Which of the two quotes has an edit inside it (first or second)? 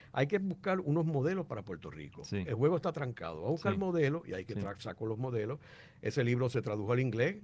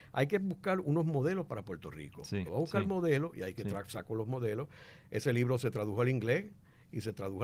second